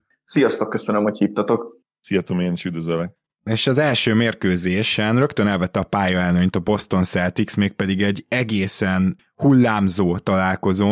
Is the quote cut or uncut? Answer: uncut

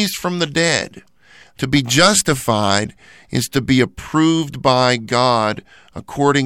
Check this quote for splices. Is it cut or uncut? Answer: cut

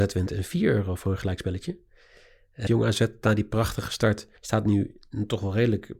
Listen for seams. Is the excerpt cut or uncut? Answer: cut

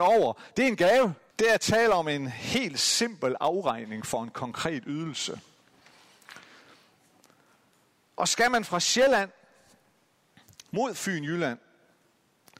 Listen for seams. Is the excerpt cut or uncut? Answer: cut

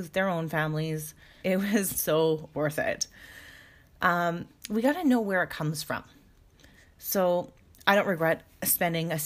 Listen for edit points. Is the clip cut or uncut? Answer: cut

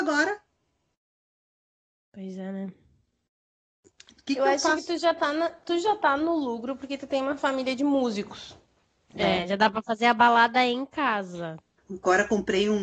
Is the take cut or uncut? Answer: cut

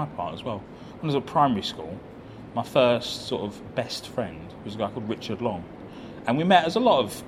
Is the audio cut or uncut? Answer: uncut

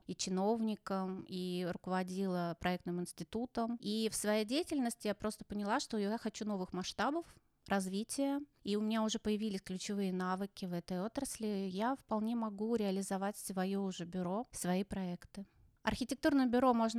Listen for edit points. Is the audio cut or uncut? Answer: cut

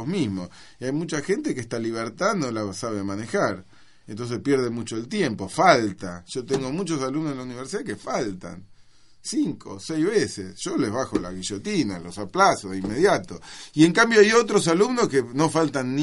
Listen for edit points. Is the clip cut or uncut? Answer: uncut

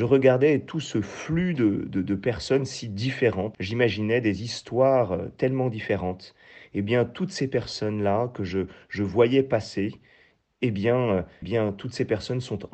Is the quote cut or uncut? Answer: cut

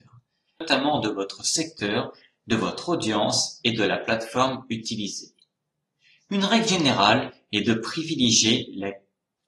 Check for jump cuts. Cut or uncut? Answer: uncut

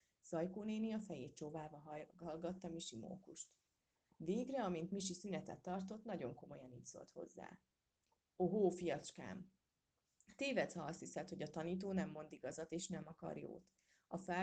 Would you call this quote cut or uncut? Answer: uncut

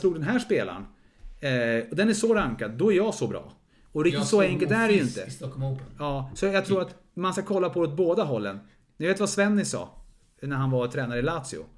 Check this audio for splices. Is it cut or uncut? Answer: uncut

